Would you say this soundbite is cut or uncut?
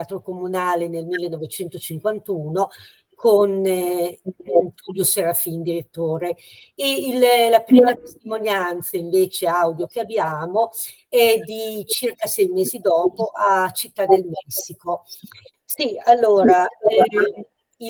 cut